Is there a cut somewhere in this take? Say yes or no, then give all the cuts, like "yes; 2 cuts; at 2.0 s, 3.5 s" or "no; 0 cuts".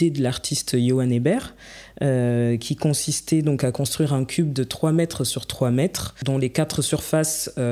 no; 0 cuts